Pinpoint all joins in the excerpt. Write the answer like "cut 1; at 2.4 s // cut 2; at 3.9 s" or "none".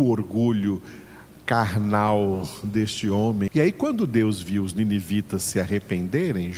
cut 1; at 3.5 s